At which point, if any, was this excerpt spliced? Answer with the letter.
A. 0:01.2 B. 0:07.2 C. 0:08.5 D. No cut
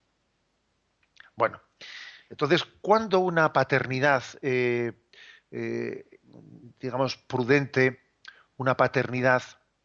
A